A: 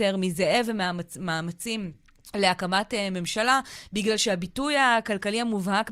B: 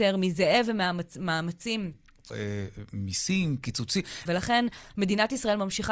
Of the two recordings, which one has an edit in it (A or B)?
B